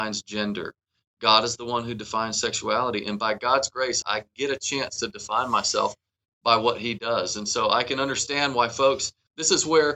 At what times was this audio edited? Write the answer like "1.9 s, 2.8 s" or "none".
4.0 s